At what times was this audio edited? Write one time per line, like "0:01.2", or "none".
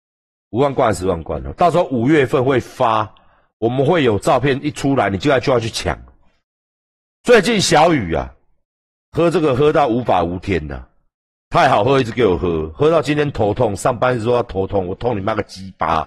none